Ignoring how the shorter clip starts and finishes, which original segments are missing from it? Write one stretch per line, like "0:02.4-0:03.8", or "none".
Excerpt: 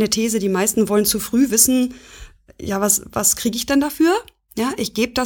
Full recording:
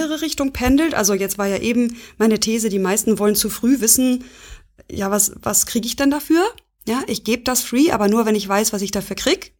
none